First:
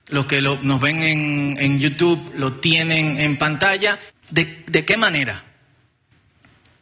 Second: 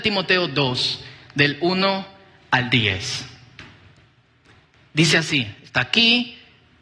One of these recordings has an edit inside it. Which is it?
first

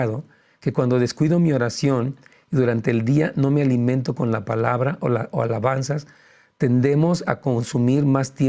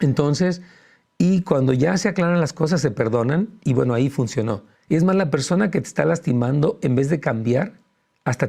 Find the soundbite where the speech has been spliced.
second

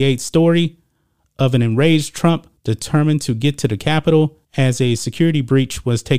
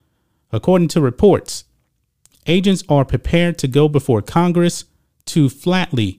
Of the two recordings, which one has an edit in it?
first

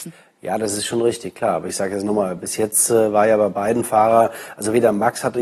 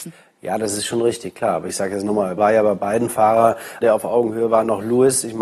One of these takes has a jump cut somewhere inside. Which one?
second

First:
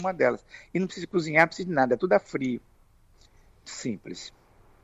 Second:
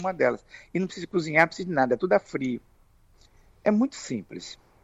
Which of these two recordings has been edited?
first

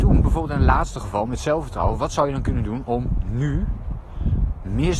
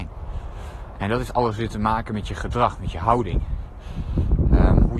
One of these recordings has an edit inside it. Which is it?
second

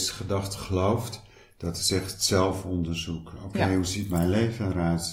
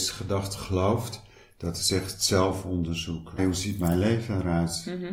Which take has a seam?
second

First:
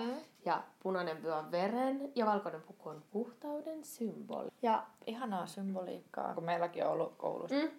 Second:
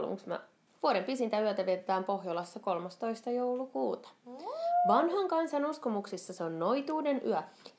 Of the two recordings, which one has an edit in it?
first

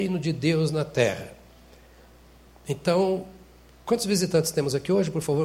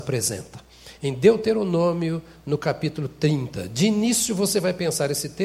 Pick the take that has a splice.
second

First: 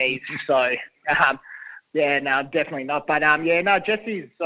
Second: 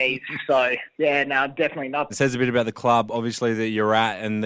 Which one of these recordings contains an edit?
second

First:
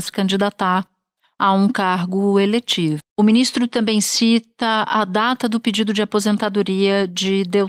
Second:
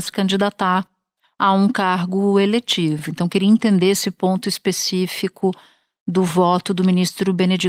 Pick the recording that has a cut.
first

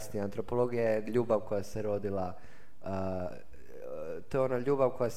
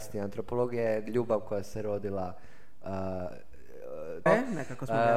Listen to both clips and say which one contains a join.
second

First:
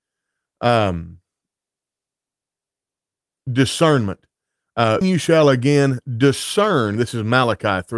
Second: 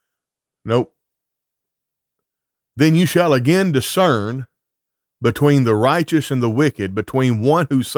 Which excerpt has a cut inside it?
first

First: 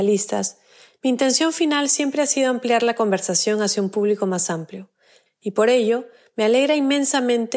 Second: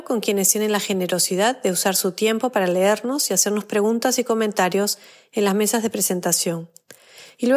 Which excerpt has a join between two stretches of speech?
first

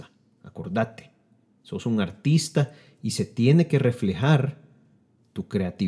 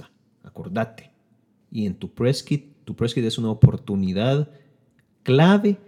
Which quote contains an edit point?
second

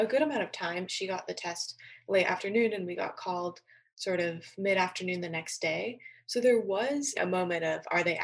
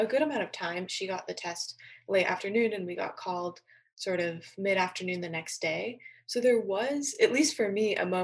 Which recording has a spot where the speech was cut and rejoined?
first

